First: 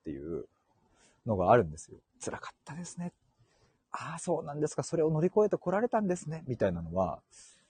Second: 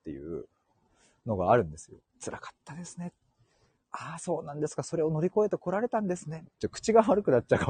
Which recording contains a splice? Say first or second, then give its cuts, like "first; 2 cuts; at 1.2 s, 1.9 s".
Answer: second; 1 cut; at 6.4 s